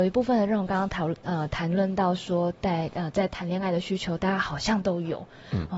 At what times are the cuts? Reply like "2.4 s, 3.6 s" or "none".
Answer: none